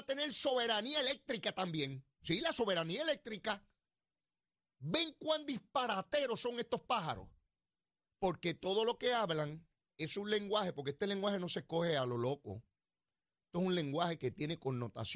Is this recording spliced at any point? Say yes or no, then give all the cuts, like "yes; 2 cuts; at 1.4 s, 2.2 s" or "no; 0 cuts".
no; 0 cuts